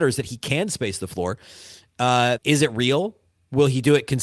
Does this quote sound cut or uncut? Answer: cut